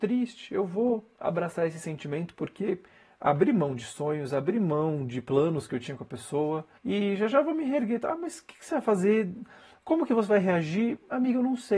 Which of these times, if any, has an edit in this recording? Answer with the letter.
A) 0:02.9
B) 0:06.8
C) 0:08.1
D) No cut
B